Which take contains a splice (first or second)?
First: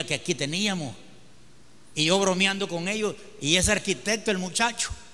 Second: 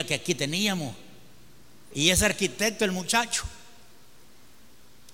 second